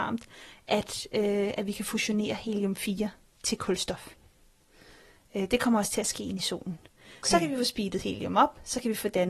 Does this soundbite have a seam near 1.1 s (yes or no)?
no